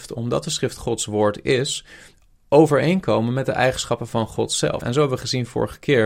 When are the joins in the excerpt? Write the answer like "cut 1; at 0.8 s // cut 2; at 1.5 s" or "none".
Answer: cut 1; at 4.8 s